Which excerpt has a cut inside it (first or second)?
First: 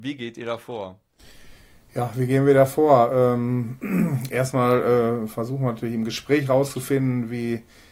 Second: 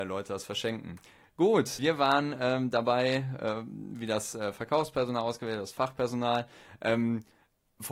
second